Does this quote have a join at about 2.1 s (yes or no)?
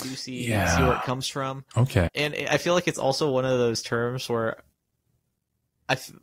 yes